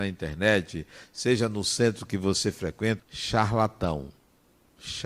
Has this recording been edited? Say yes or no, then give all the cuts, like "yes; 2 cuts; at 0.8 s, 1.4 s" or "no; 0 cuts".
yes; 1 cut; at 3.0 s